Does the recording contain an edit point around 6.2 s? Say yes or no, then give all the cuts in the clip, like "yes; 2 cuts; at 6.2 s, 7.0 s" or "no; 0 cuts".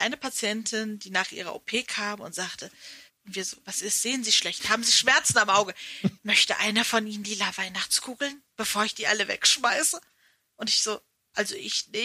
yes; 2 cuts; at 3.1 s, 6.2 s